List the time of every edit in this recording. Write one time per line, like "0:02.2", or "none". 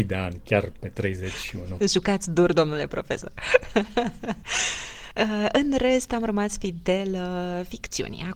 0:01.8